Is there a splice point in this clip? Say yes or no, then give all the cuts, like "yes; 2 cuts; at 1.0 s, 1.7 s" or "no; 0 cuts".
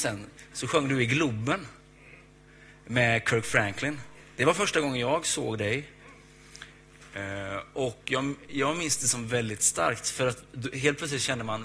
no; 0 cuts